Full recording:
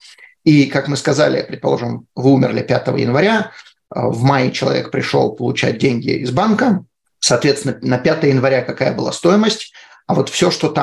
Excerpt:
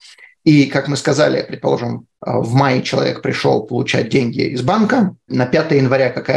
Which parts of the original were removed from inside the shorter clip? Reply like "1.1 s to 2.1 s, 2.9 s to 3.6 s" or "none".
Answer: 2.1 s to 3.8 s, 7.0 s to 7.8 s